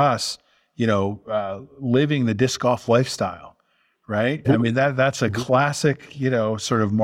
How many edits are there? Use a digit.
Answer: 1